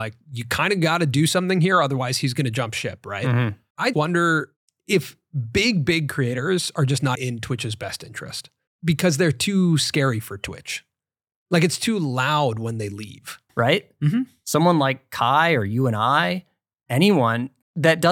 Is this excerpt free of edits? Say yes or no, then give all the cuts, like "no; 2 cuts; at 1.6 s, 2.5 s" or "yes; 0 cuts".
no; 3 cuts; at 3.9 s, 7.1 s, 13.5 s